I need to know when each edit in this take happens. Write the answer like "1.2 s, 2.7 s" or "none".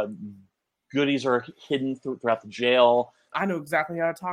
3.3 s